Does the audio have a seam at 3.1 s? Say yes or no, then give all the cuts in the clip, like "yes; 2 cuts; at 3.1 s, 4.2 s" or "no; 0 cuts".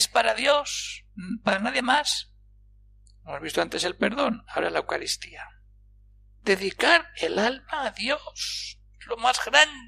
yes; 1 cut; at 3.1 s